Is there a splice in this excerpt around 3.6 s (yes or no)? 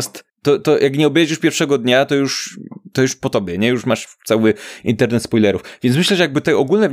no